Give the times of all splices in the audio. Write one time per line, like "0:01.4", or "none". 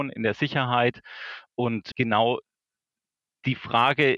0:01.9